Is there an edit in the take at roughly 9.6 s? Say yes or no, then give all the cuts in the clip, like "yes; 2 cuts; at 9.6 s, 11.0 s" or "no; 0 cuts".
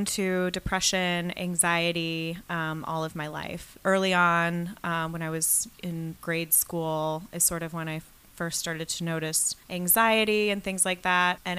yes; 3 cuts; at 3.8 s, 6.2 s, 9.6 s